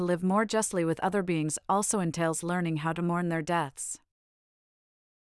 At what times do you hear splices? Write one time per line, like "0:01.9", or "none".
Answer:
none

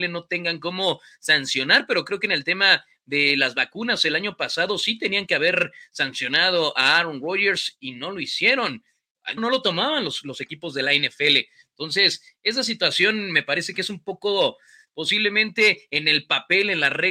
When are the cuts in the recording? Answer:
0:09.4
0:14.9

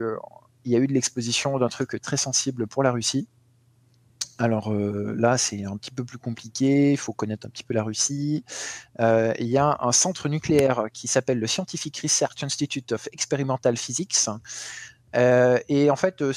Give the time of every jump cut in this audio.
0:02.0

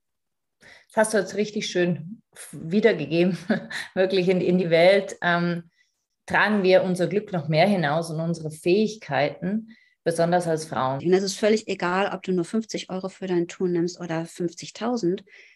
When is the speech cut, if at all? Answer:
0:11.0

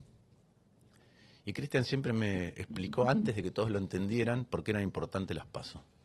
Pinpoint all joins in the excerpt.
none

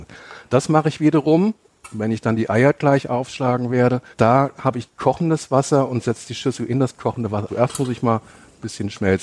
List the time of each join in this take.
0:04.1
0:07.5

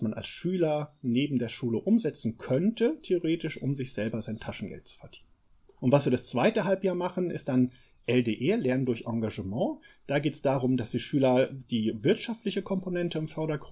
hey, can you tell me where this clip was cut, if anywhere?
0:05.8
0:11.6

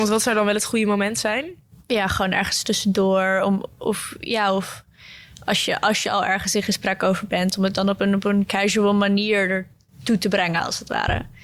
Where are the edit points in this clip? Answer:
none

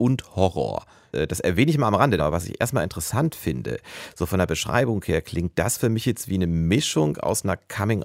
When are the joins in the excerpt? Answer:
0:01.1
0:02.2

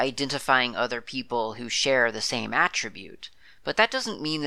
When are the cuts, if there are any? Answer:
none

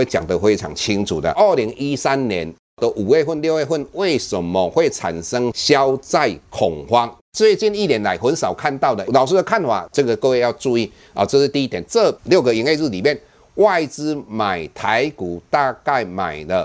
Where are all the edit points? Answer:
0:07.2
0:09.9
0:11.9

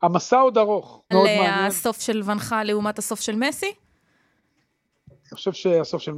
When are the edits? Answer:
0:01.1

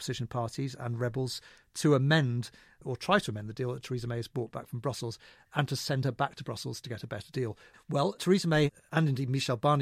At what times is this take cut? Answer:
0:07.7

